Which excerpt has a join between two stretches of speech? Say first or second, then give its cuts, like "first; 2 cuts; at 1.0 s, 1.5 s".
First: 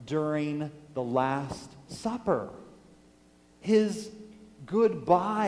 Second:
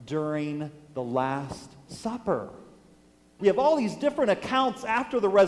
second; 1 cut; at 3.4 s